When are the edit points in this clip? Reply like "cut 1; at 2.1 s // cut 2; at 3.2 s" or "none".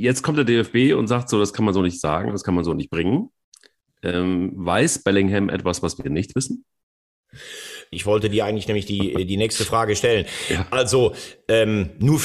cut 1; at 7.9 s